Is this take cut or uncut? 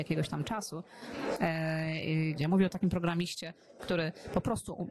cut